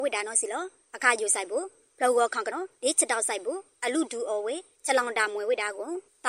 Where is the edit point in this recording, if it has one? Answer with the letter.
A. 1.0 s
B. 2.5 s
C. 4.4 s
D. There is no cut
B